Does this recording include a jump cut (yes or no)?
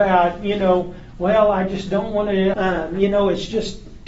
yes